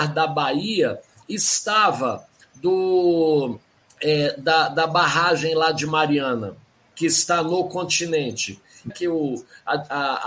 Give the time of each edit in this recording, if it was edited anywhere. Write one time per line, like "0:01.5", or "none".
0:08.9